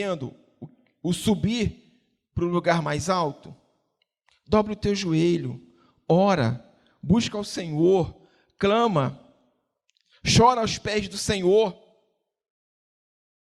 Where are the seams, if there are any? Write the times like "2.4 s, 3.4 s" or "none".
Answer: none